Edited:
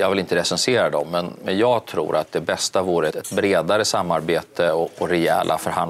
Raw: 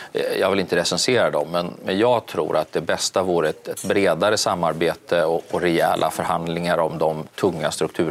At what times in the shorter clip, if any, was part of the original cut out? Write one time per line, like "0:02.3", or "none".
0:03.1